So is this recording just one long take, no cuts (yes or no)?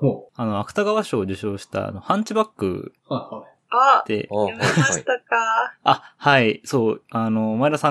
yes